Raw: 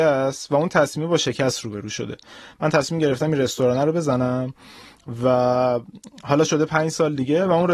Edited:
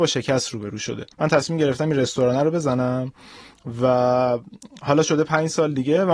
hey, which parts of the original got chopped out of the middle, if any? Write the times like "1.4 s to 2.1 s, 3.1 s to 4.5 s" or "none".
2.2 s to 2.5 s